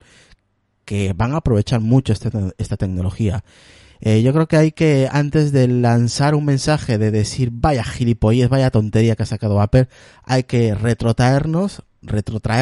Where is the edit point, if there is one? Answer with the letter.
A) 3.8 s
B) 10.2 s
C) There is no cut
C